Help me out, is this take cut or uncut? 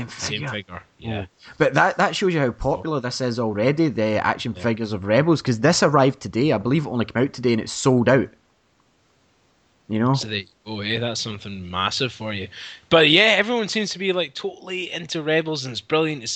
uncut